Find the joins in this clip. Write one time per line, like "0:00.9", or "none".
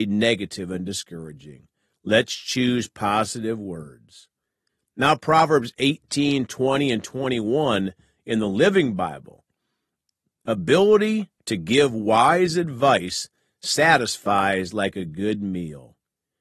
none